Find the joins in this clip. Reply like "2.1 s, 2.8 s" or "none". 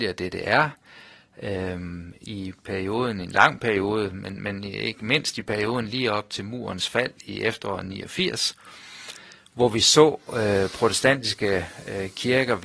none